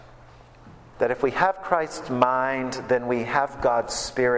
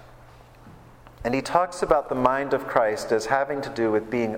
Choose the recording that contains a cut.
first; 1 cut; at 0.9 s

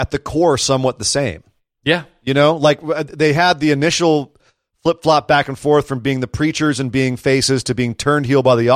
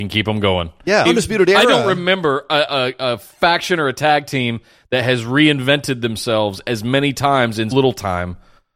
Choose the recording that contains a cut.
second; 2 cuts; at 1.0 s, 7.7 s

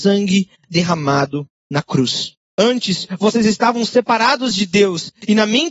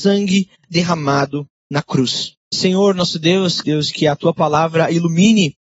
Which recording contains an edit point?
second; 2 cuts; at 2.4 s, 3.6 s

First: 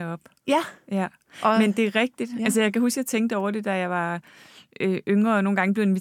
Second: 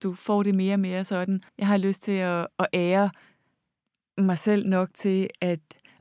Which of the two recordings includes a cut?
second; 1 cut; at 1.5 s

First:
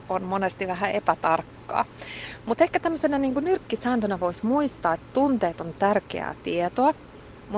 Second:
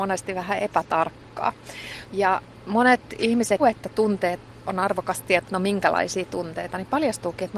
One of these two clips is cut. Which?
second; 3 cuts; at 2.1 s, 3.6 s, 5.4 s

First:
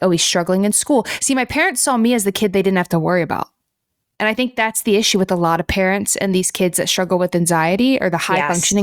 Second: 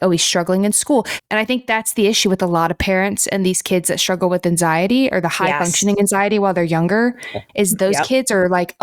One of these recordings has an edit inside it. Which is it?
second; 2 cuts; at 1.2 s, 7.5 s

